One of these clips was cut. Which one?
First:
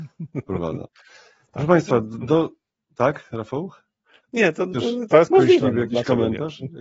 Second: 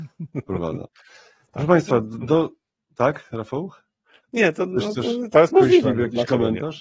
first; 1 cut; at 4.7 s

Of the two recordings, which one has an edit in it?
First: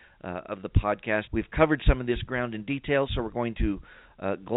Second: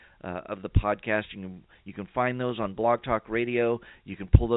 first; 1 cut; at 1.3 s

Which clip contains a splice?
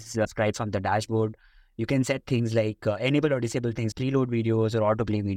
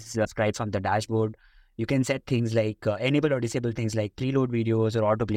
first; 1 cut; at 3.9 s

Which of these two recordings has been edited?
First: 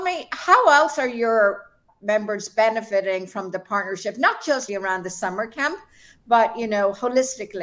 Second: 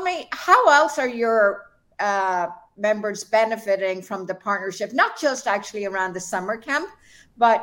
first; 2 cuts; at 1.9 s, 4.7 s

